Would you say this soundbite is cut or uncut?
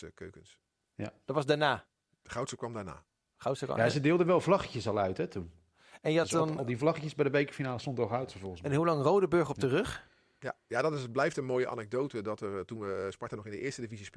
uncut